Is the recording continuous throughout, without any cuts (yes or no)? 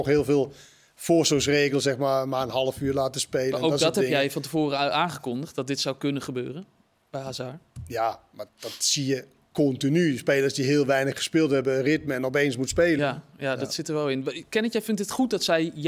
no